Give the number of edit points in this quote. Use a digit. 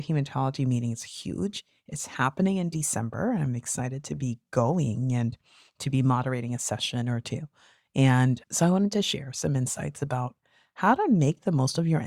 0